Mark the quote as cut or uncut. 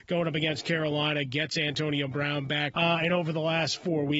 cut